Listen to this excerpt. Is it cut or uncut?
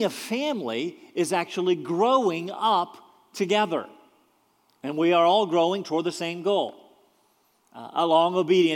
uncut